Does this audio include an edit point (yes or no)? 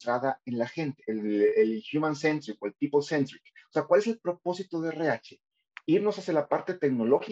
no